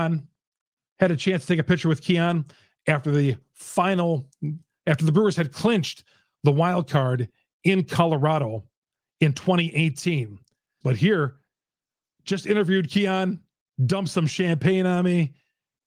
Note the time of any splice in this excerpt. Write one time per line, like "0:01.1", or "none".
0:10.8